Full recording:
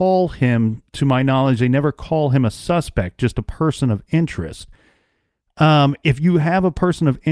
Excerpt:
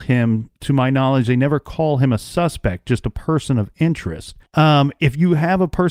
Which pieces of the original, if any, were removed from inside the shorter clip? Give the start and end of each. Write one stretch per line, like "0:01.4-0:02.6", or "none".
0:04.8-0:05.5